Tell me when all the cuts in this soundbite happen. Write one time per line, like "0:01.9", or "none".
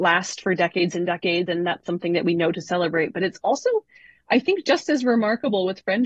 none